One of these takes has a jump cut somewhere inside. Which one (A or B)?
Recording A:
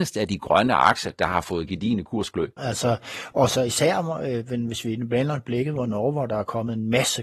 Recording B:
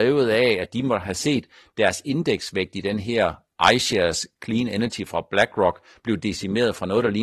A